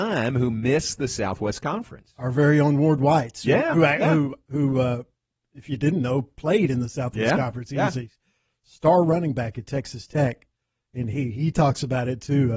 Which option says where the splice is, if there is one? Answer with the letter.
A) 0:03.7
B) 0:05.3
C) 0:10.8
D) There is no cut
D